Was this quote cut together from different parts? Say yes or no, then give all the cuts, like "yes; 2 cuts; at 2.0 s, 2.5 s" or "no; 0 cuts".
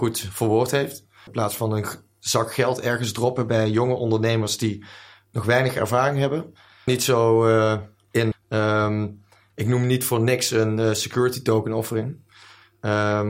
yes; 3 cuts; at 1.3 s, 6.9 s, 8.3 s